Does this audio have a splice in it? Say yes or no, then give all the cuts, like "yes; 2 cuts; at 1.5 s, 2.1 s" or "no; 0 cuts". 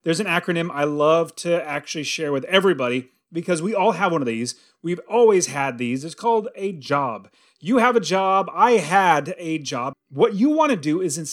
yes; 1 cut; at 9.9 s